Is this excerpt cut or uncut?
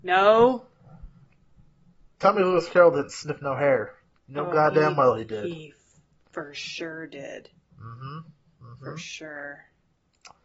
uncut